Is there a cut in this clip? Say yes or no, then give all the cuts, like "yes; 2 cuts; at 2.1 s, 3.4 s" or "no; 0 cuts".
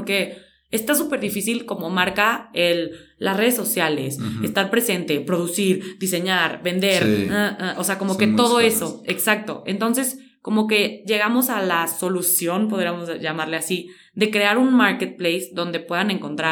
no; 0 cuts